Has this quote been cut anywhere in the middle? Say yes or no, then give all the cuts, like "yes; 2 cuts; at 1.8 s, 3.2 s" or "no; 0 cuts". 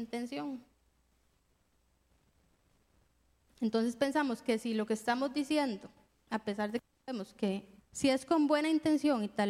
yes; 1 cut; at 7.8 s